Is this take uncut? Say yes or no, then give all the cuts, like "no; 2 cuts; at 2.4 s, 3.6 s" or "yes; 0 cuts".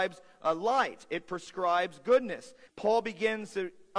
no; 1 cut; at 2.7 s